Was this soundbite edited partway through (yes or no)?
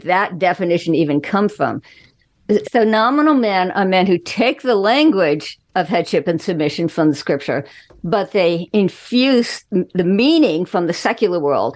yes